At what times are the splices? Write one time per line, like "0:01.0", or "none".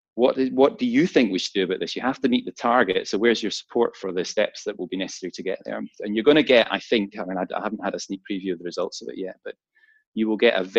none

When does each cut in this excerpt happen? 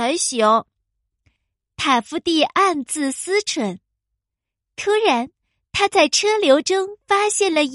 none

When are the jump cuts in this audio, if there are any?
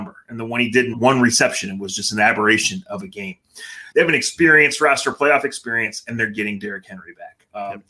0:00.9
0:03.9

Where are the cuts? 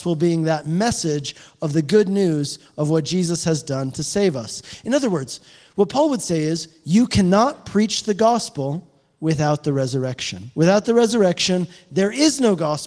none

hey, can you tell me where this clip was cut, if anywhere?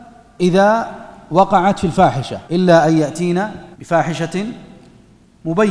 0:02.5
0:03.7

